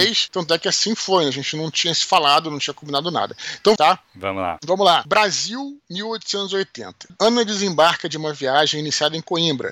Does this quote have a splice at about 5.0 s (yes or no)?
no